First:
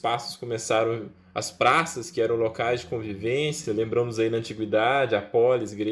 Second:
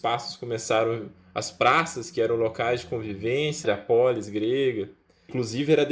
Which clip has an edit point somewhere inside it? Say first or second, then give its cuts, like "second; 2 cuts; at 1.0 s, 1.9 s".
second; 1 cut; at 3.6 s